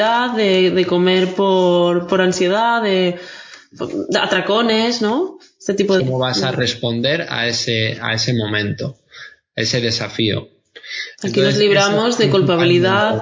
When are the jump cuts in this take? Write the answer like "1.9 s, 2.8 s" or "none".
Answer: 6.0 s